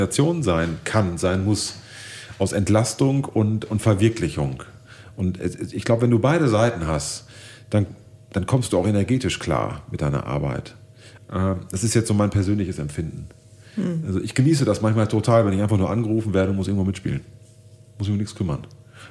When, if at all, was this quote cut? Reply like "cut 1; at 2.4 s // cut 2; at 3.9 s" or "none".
cut 1; at 11.2 s